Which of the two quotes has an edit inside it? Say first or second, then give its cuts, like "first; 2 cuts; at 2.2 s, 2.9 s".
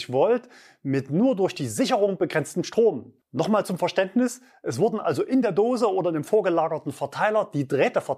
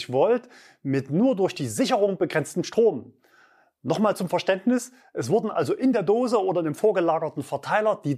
first; 1 cut; at 3.2 s